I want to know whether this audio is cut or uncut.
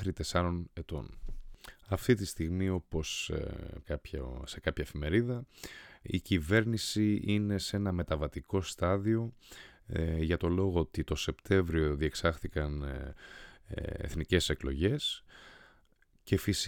cut